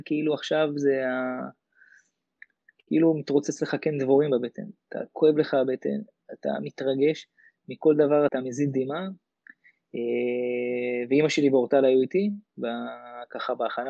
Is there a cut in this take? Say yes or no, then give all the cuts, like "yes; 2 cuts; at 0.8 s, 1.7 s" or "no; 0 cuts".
yes; 1 cut; at 8.3 s